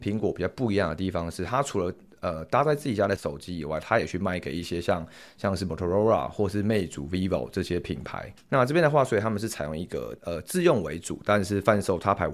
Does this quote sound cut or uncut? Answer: uncut